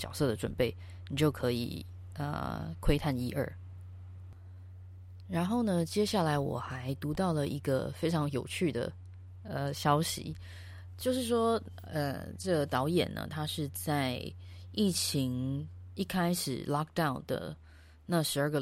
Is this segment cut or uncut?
uncut